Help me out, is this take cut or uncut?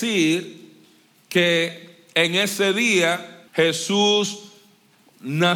cut